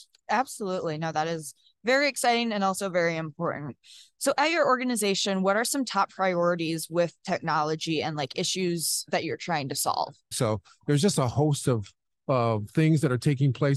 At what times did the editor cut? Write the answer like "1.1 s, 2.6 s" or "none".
10.3 s